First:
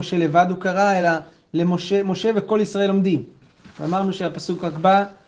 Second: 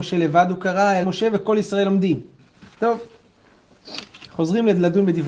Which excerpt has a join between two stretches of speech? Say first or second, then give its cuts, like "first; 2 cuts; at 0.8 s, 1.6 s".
second; 2 cuts; at 1.0 s, 2.7 s